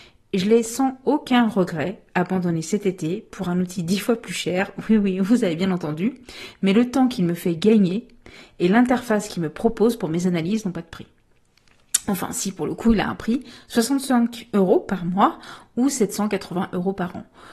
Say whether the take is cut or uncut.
uncut